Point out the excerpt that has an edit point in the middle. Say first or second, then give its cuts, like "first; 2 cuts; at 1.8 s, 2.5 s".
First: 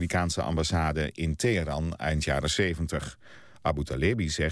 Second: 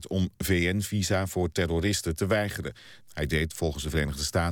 second; 1 cut; at 3.0 s